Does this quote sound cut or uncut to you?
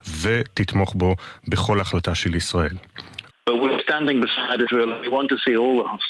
cut